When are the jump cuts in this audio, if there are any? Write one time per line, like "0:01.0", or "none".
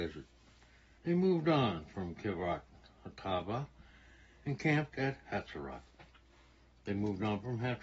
0:01.0